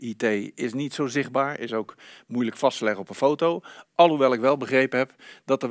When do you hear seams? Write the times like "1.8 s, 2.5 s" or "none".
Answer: none